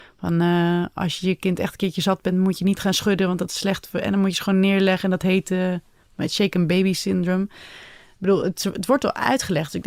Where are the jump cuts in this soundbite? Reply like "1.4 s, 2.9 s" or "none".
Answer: none